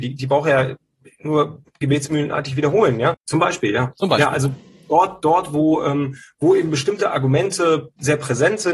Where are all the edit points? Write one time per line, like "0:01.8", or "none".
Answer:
0:03.1